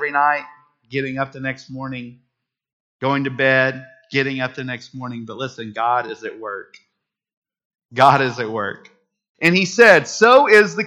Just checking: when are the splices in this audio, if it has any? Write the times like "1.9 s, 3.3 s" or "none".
9.3 s